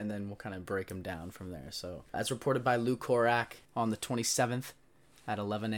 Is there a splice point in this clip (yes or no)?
yes